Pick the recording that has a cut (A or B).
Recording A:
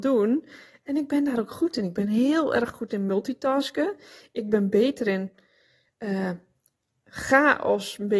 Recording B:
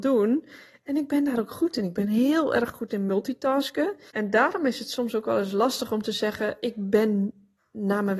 B